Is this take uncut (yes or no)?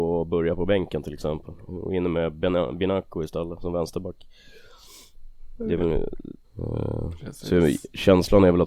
no